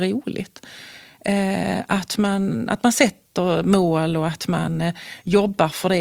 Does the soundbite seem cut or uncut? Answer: uncut